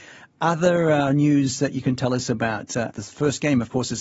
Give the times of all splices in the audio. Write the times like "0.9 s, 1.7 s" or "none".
2.9 s